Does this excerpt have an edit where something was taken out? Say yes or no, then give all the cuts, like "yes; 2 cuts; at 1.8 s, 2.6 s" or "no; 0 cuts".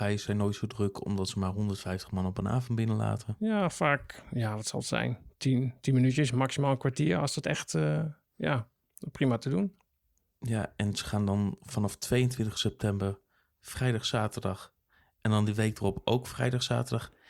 no; 0 cuts